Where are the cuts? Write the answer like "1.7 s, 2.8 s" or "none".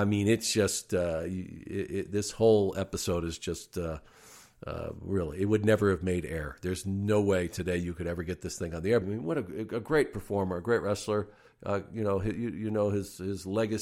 9.0 s